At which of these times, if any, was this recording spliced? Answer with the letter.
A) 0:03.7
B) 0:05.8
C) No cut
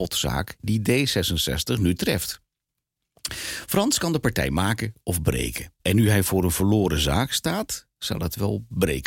B